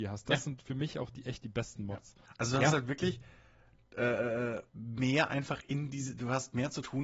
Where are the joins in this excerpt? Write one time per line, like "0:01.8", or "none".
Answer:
0:02.2
0:04.7